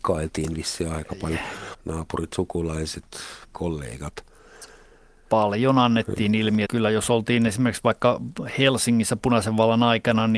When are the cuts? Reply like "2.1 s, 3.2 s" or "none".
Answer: 1.7 s, 6.6 s